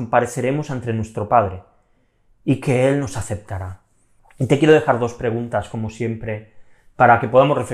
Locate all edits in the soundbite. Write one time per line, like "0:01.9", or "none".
0:04.2